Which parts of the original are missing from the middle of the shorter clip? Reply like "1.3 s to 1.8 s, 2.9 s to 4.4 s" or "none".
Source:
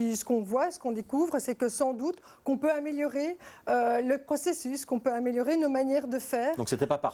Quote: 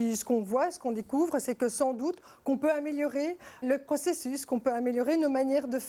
3.6 s to 4.0 s